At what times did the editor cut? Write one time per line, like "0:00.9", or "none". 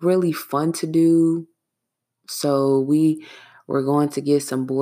none